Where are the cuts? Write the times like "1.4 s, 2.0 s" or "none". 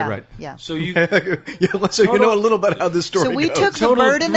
none